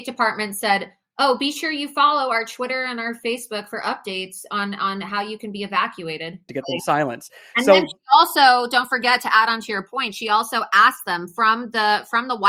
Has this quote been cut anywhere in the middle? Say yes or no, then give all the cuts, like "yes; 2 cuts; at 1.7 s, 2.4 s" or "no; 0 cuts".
yes; 1 cut; at 6.5 s